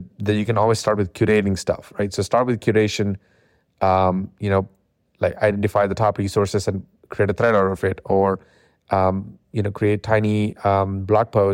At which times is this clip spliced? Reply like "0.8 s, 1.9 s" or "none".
none